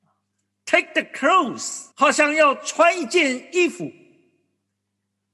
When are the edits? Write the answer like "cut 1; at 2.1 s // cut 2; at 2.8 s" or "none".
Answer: cut 1; at 1.9 s